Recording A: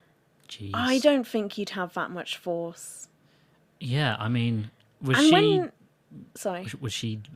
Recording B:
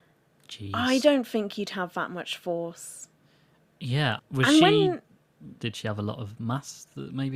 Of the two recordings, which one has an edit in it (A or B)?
B